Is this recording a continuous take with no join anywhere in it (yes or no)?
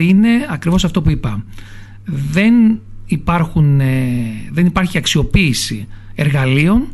yes